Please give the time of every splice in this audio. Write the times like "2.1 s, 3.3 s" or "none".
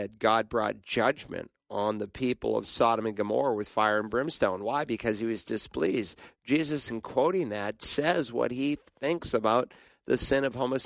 none